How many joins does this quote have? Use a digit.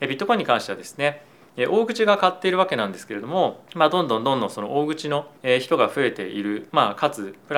2